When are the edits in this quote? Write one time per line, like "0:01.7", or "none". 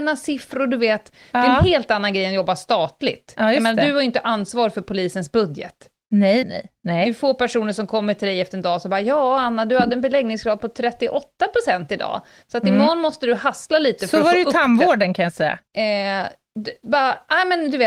0:06.4
0:15.7